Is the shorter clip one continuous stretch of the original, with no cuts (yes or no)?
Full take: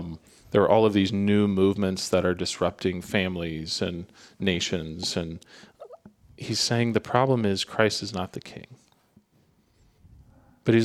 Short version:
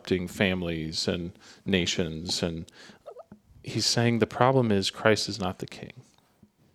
yes